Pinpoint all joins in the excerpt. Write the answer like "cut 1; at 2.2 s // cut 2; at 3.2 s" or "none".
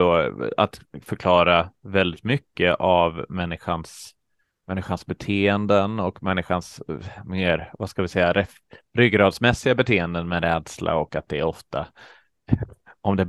none